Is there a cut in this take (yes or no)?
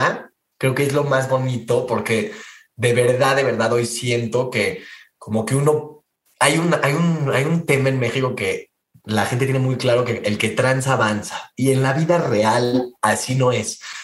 no